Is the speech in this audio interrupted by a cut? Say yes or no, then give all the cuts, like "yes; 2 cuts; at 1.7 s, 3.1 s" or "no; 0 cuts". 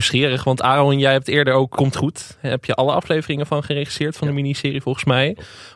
yes; 1 cut; at 1.7 s